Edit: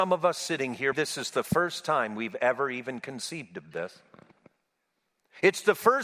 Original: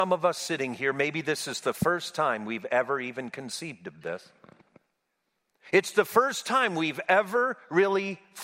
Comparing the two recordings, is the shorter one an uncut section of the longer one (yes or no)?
no